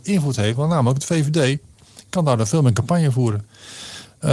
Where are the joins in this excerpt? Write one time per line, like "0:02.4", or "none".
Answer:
none